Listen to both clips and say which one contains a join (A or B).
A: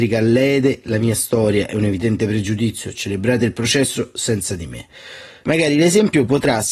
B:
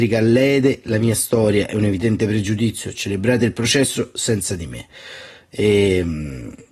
A